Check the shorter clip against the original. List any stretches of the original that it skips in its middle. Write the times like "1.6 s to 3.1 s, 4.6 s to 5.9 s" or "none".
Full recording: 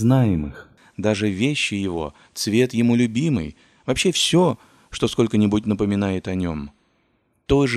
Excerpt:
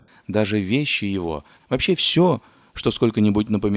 2.3 s to 3.8 s